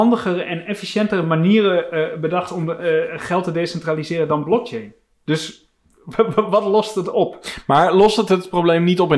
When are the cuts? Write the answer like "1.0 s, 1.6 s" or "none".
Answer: none